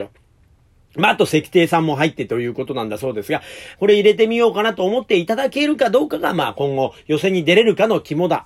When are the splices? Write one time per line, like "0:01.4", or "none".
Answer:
0:03.7

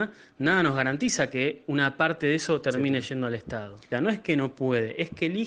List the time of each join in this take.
0:03.9

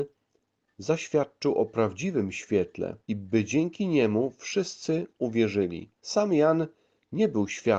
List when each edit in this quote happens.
0:03.0
0:06.0

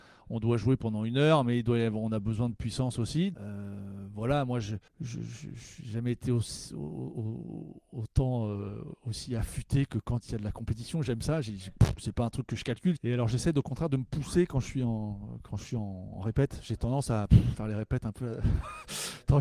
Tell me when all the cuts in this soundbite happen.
0:03.3
0:04.9
0:13.0

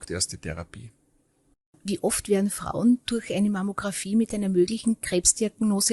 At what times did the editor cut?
none

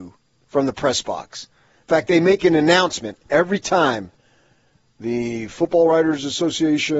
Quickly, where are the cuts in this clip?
none

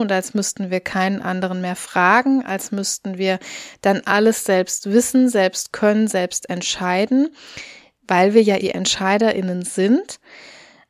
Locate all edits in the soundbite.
0:08.6

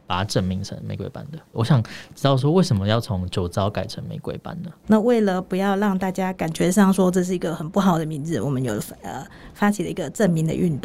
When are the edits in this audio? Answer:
0:01.5
0:04.8

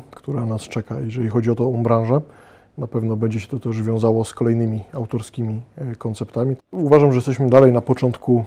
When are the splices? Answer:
0:02.7
0:06.6

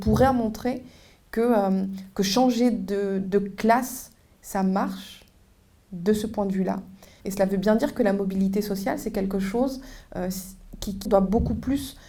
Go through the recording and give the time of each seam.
0:07.2
0:11.1

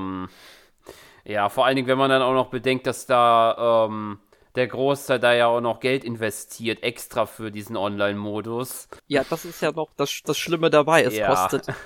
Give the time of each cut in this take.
0:09.0

